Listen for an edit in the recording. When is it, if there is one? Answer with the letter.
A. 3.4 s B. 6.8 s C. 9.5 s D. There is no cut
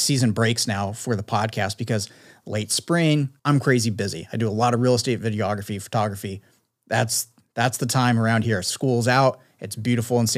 A